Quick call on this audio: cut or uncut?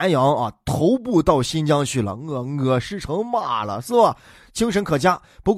uncut